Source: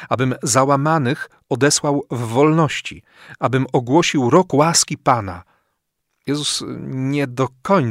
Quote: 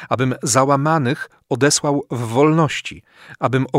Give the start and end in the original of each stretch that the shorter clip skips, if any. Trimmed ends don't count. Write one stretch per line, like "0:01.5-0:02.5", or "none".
none